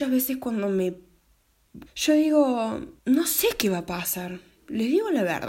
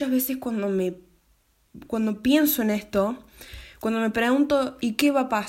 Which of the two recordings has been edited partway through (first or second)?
first